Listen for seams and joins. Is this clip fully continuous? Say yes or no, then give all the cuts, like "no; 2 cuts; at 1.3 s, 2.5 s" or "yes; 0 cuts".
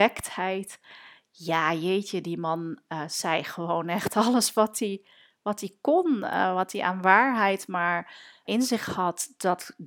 no; 1 cut; at 8.4 s